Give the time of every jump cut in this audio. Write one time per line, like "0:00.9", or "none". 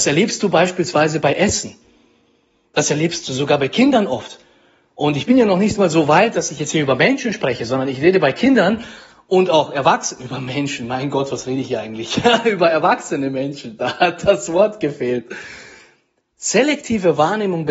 none